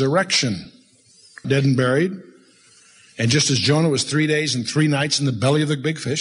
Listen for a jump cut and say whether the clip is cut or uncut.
cut